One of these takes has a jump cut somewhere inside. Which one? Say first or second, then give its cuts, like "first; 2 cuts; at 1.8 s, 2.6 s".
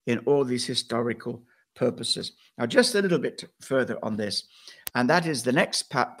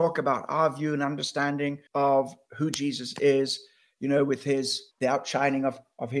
second; 2 cuts; at 1.9 s, 4.9 s